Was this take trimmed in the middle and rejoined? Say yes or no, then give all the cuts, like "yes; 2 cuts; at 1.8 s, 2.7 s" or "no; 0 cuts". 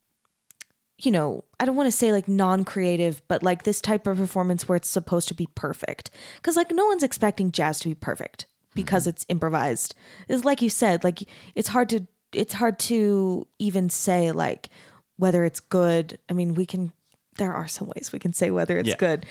no; 0 cuts